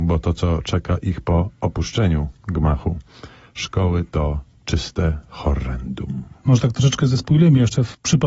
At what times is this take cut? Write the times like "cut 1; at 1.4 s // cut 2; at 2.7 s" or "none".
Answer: none